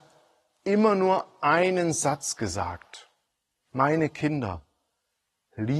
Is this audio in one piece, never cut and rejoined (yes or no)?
yes